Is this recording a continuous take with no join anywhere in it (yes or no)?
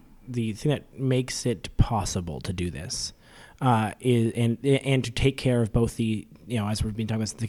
yes